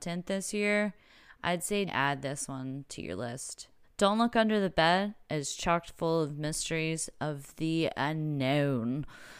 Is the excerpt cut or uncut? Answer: cut